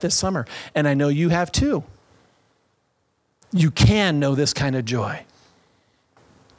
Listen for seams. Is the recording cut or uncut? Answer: uncut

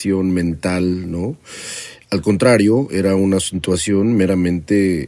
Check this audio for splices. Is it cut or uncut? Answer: uncut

